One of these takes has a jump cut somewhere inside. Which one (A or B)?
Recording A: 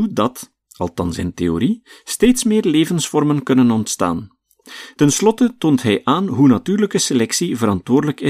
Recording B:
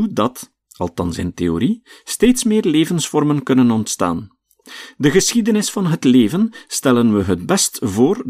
A